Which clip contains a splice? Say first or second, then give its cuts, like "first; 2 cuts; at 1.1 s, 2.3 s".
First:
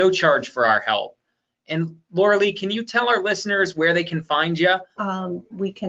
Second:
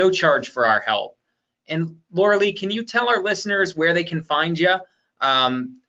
first; 1 cut; at 5.0 s